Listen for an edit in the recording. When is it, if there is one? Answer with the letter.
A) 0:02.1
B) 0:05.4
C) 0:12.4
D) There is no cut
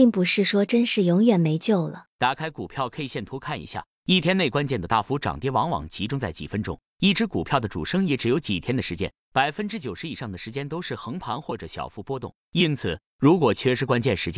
A